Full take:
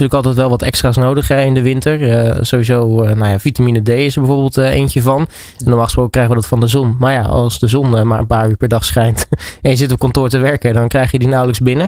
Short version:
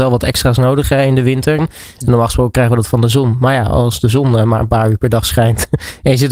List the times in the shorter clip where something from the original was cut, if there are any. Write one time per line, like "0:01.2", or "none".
0:01.6